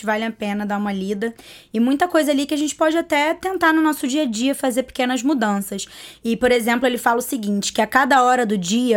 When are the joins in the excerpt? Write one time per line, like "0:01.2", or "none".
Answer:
none